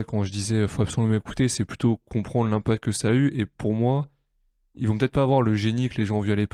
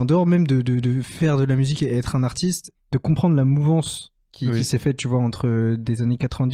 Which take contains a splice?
second; 1 cut; at 2.7 s

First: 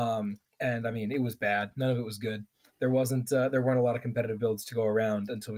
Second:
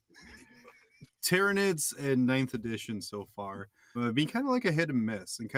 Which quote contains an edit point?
second; 1 cut; at 3.9 s

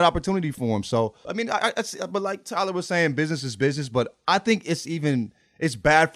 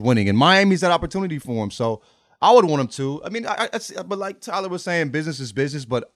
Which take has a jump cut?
first; 1 cut; at 1.2 s

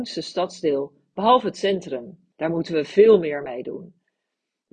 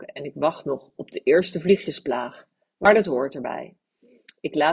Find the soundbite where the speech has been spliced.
first; 1 cut; at 2.3 s

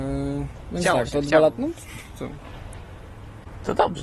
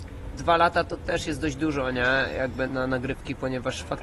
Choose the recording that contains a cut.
second; 1 cut; at 2.7 s

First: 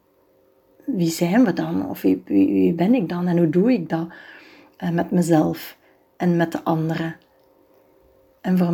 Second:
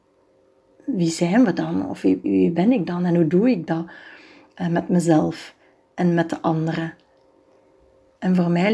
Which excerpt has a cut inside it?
second; 1 cut; at 2.2 s

